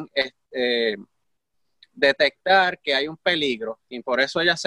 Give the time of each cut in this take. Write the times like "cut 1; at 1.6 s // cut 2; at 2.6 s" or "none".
none